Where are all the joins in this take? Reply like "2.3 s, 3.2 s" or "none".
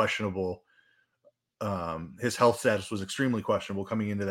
none